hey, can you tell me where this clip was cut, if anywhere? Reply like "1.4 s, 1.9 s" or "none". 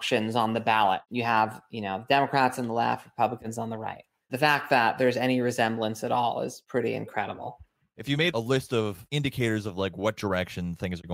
none